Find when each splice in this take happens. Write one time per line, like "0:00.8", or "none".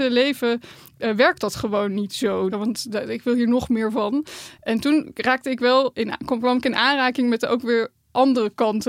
0:02.5
0:05.9